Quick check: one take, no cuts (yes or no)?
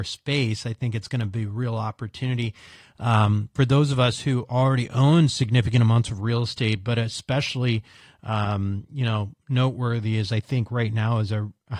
yes